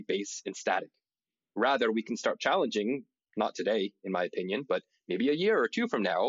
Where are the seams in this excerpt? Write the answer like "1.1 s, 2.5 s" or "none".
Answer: none